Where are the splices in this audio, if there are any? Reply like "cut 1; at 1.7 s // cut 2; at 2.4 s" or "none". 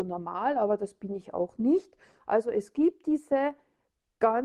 cut 1; at 2.2 s